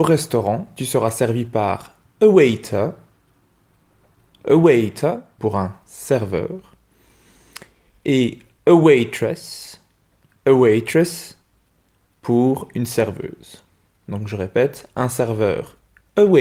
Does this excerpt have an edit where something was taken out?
yes; 1 cut; at 5.4 s

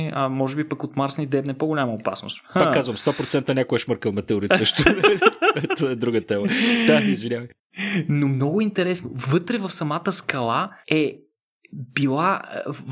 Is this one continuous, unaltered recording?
no; 1 cut; at 10.8 s

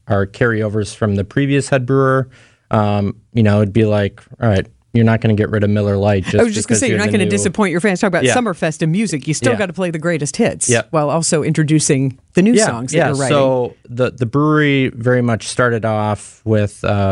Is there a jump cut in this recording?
no; 0 cuts

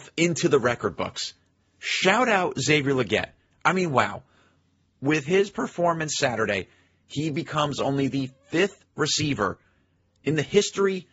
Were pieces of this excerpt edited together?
no; 0 cuts

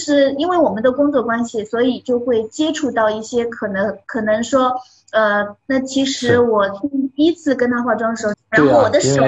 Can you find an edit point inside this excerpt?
yes; 3 cuts; at 4.0 s, 5.6 s, 8.3 s

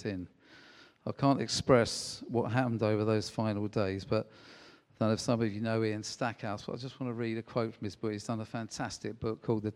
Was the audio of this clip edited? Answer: no; 0 cuts

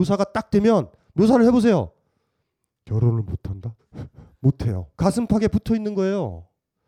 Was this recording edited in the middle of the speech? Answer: yes; 2 cuts; at 3.8 s, 4.9 s

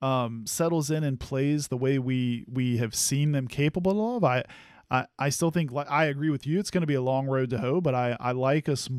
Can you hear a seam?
no; 0 cuts

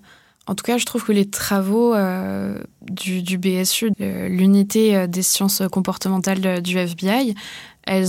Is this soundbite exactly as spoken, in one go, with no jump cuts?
no; 1 cut; at 3.9 s

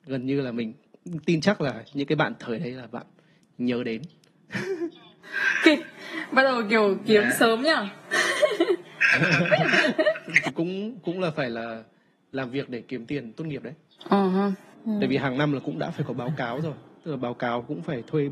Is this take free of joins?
yes; 0 cuts

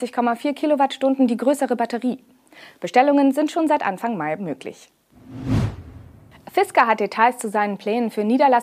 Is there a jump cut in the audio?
no; 0 cuts

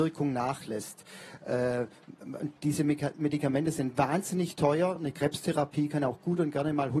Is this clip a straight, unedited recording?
yes; 0 cuts

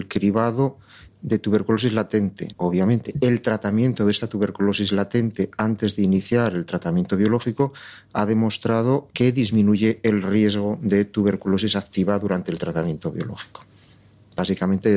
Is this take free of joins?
no; 2 cuts; at 2.5 s, 9.1 s

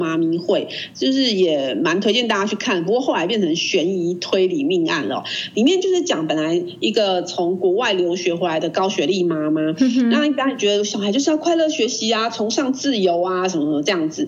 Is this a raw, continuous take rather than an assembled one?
yes; 0 cuts

